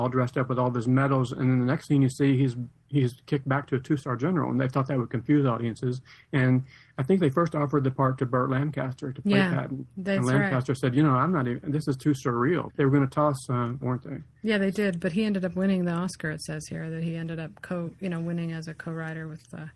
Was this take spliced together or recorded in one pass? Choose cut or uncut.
cut